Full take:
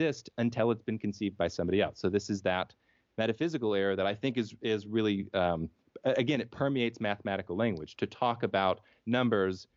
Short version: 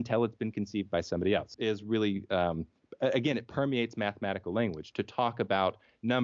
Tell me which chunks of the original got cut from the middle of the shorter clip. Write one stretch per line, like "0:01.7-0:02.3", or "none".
0:02.0-0:04.6